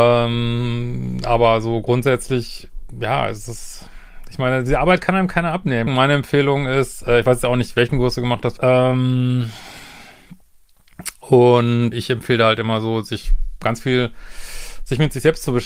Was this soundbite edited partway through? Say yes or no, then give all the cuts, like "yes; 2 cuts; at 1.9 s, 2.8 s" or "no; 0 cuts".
yes; 3 cuts; at 5.9 s, 8.6 s, 11.9 s